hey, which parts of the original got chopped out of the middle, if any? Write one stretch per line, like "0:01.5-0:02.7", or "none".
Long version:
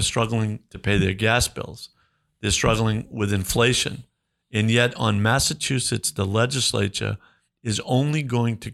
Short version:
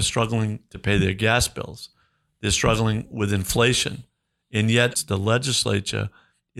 0:04.9-0:06.0